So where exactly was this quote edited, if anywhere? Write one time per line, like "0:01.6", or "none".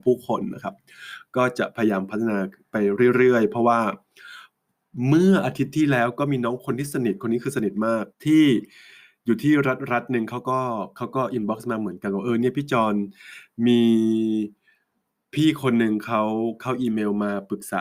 0:08.1

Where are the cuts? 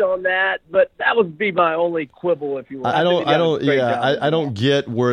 0:02.9

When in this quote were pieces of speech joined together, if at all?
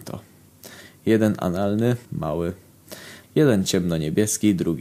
0:02.0
0:03.2

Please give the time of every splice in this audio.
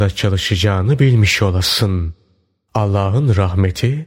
none

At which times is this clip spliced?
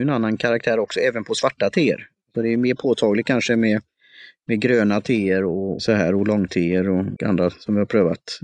0:05.8
0:07.2

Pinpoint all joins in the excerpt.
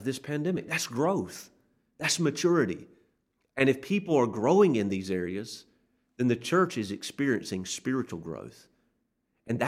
none

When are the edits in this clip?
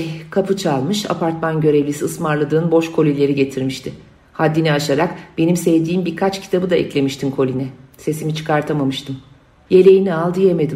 0:09.7

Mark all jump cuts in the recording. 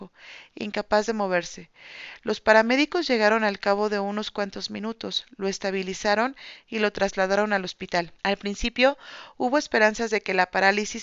0:08.2

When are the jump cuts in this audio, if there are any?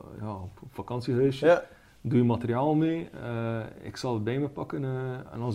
none

